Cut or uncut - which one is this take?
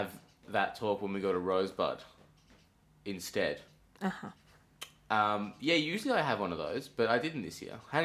uncut